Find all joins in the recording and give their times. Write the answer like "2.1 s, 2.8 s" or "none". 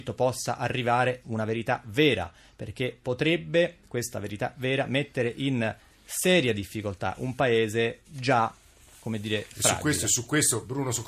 8.0 s